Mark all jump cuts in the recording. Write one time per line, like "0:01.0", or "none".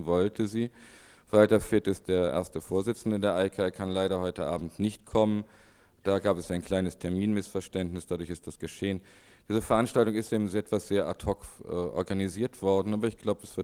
none